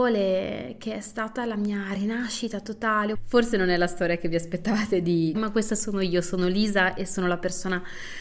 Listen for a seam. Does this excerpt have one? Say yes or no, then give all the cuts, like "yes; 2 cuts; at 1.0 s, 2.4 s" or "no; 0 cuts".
yes; 2 cuts; at 3.1 s, 5.3 s